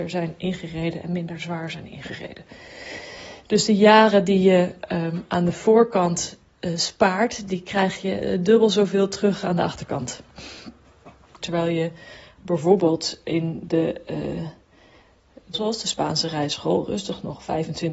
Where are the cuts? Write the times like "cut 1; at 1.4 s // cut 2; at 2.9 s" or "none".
cut 1; at 11.4 s // cut 2; at 15.5 s